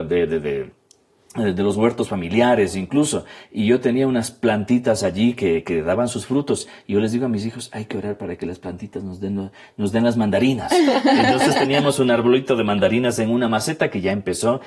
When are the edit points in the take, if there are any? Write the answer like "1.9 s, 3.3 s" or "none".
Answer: none